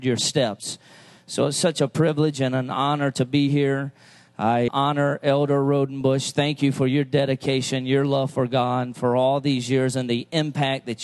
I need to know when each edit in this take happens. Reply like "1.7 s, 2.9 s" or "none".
4.7 s